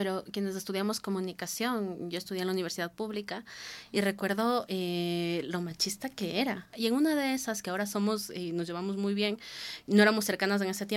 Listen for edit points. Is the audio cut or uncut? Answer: cut